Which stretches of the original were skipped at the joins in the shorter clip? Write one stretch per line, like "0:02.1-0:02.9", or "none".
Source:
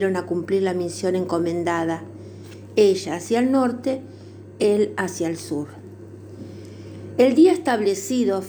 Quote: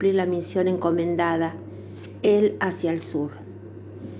0:02.7-0:04.6